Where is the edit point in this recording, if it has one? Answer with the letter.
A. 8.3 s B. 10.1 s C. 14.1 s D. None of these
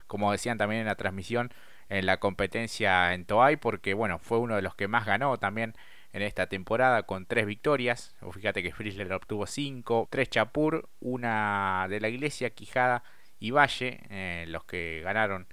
B